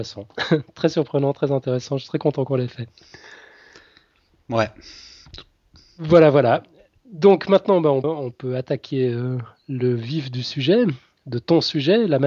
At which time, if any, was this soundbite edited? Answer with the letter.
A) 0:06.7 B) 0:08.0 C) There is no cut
B